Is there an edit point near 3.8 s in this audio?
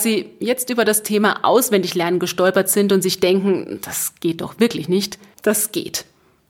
no; 1 cut; at 5.4 s

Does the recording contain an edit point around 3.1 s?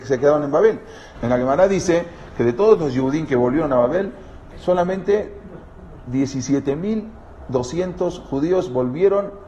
no; 2 cuts; at 1.2 s, 4.5 s

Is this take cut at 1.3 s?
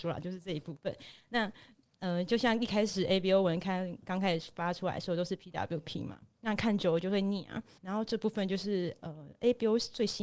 no; 1 cut; at 7.8 s

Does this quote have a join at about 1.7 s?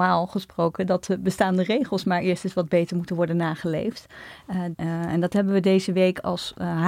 no; 1 cut; at 4.7 s

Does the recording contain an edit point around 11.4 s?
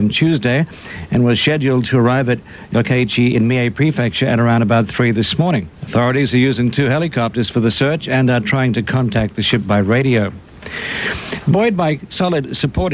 no; 1 cut; at 5.8 s

